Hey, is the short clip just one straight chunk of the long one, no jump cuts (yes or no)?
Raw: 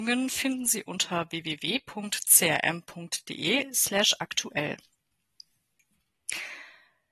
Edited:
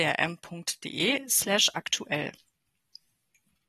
yes